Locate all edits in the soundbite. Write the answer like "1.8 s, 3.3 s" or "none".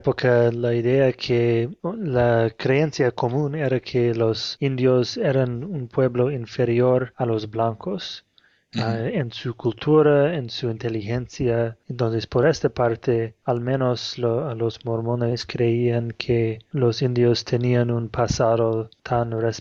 none